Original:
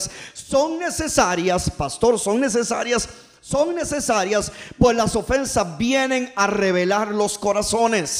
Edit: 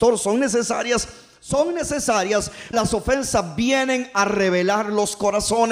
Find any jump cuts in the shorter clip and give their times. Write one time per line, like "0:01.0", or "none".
0:02.7